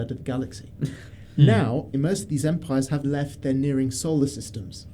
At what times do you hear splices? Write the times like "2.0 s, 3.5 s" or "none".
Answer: 1.9 s, 3.0 s